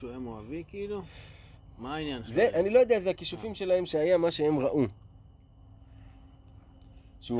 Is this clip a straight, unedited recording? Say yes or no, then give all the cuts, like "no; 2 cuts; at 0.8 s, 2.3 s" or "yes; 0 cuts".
yes; 0 cuts